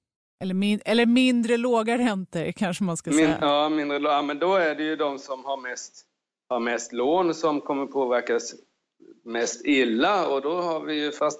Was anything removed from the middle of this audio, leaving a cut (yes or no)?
no